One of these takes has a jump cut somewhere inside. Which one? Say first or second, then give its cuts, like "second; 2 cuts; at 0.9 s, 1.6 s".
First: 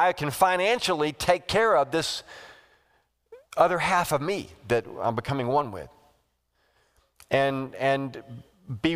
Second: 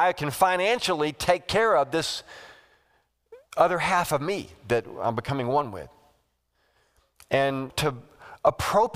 second; 1 cut; at 7.7 s